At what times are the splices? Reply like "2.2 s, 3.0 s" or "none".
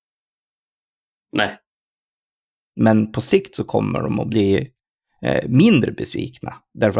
none